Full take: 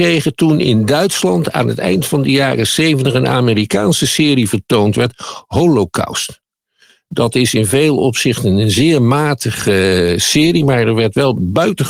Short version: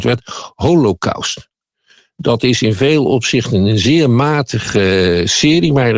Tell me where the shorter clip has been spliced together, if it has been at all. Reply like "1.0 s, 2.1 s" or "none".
none